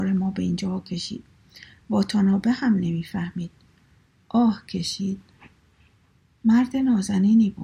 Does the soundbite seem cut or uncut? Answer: uncut